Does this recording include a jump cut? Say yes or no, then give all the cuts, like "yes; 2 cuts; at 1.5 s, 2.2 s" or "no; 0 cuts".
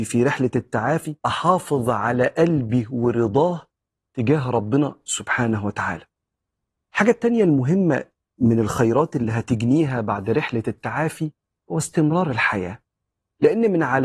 yes; 1 cut; at 1.2 s